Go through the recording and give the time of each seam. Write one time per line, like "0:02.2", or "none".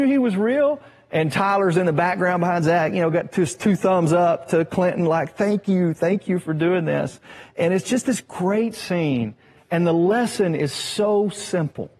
none

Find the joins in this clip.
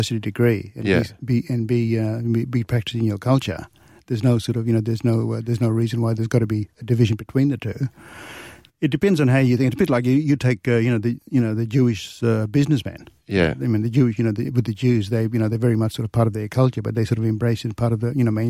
none

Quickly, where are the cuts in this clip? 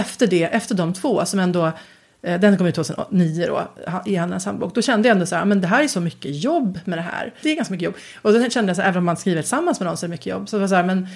0:07.4

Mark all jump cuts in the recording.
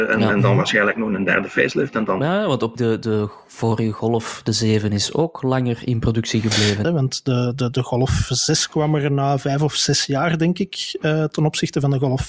0:02.8
0:06.8

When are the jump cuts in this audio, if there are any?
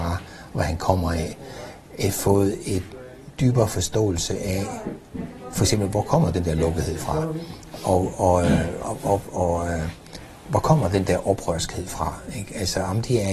none

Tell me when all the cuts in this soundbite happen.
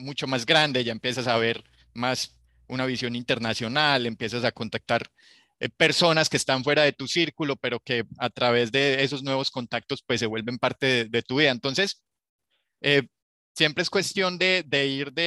none

